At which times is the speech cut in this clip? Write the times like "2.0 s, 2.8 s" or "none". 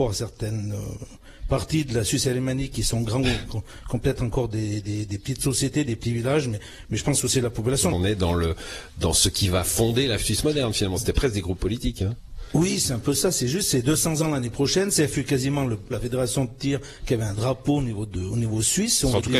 7.9 s, 15.9 s